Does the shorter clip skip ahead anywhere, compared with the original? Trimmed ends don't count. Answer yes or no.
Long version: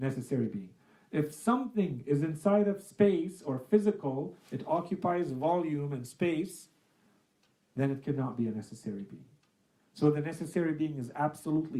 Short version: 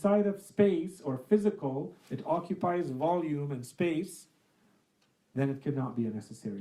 no